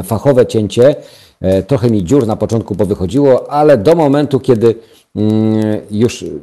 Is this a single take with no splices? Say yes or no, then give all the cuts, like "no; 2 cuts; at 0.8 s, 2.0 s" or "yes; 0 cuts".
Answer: yes; 0 cuts